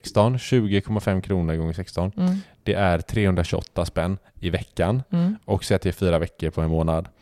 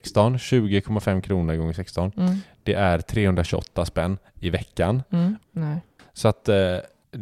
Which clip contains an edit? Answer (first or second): second